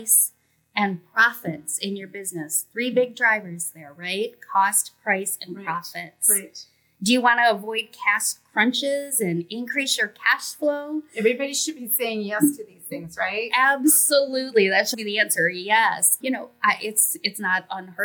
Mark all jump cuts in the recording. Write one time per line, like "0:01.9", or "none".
0:14.9
0:16.2